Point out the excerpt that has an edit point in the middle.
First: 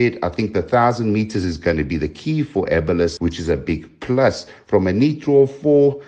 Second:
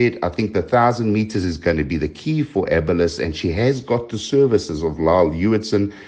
first; 1 cut; at 3.2 s

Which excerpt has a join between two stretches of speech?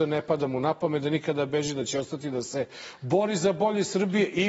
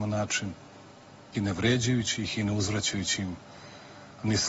second; 1 cut; at 1.3 s

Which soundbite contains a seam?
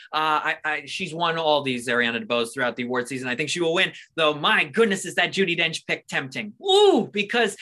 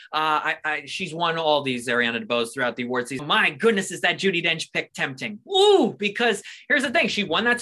second; 1 cut; at 3.2 s

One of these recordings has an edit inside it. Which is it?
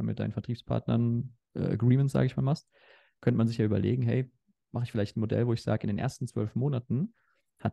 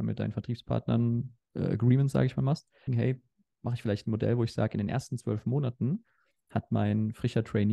second; 1 cut; at 2.9 s

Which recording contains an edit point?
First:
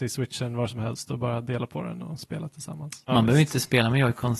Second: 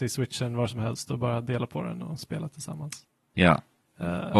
first; 1 cut; at 3.1 s

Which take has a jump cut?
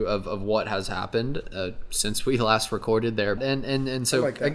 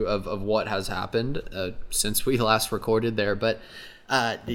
first; 1 cut; at 3.4 s

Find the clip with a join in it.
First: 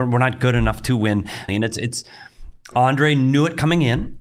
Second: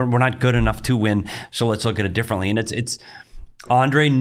first; 1 cut; at 1.5 s

